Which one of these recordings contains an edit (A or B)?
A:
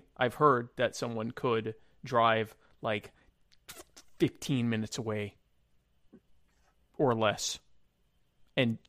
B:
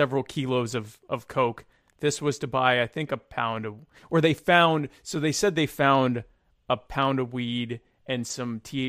B